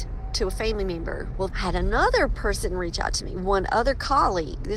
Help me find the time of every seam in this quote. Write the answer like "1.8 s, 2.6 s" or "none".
1.5 s